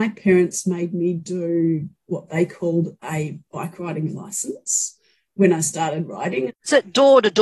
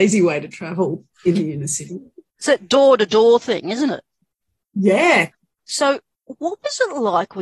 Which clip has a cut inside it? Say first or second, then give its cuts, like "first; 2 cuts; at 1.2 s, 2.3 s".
first; 1 cut; at 6.5 s